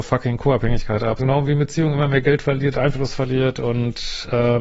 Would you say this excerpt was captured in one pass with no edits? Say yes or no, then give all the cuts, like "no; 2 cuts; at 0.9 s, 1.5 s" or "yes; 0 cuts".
no; 2 cuts; at 1.2 s, 2.7 s